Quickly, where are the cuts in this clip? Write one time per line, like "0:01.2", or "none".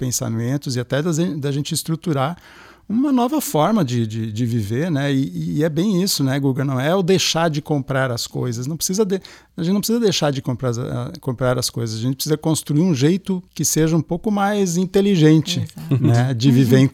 0:13.5